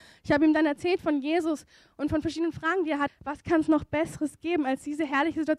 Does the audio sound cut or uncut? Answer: cut